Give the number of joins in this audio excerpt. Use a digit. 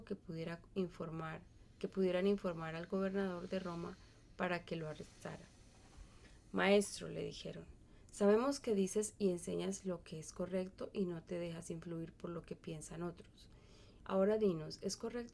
1